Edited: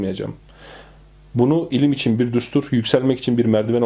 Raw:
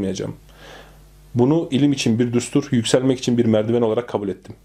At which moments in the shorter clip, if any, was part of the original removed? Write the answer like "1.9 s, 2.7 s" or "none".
none